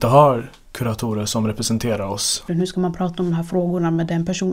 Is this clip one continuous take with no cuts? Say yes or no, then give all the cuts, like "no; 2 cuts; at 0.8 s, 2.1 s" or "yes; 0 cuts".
no; 1 cut; at 2.5 s